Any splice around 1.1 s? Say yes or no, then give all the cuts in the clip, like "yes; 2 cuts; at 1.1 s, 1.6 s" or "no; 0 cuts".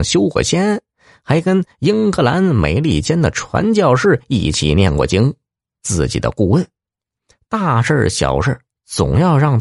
no; 1 cut; at 5.8 s